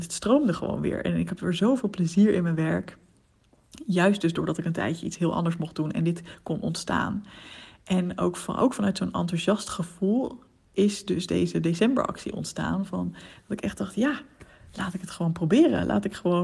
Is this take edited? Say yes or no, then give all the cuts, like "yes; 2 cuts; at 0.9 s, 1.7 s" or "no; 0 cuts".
no; 0 cuts